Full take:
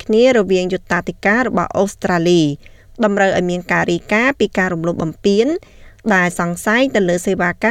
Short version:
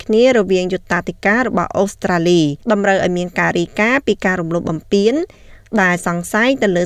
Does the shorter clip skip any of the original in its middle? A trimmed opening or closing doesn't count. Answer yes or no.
yes